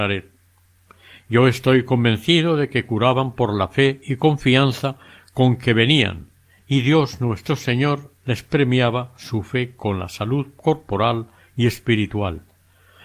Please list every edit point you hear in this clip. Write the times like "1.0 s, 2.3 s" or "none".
none